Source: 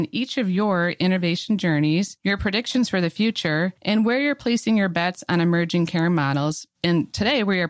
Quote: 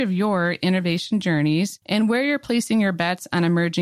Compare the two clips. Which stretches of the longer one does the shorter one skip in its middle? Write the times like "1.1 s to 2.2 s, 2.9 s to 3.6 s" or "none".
2.2 s to 3.8 s